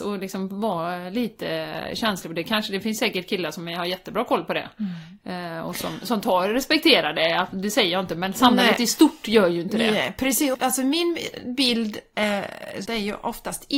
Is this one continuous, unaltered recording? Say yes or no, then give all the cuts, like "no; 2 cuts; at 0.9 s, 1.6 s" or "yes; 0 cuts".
no; 2 cuts; at 10.5 s, 12.9 s